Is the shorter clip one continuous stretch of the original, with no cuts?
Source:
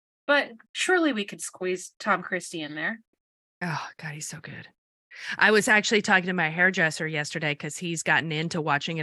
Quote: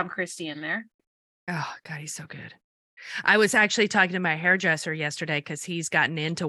yes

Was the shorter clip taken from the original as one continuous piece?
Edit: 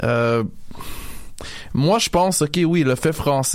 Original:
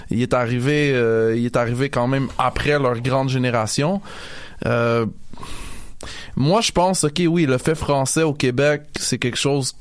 yes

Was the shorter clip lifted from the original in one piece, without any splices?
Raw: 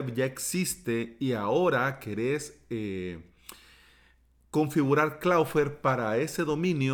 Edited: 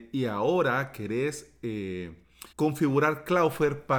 no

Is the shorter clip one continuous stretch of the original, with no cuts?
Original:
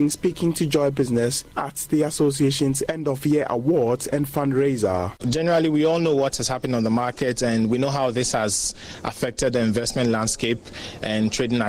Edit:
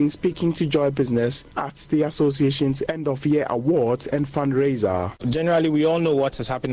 yes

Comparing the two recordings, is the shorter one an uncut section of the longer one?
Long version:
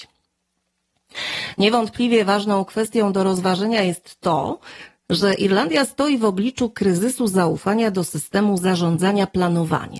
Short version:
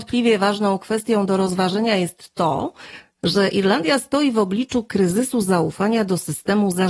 yes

